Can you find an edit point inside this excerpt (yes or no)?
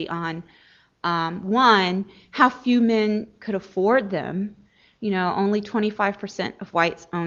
no